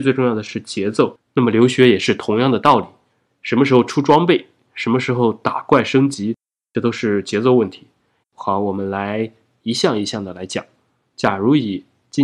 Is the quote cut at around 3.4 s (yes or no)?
no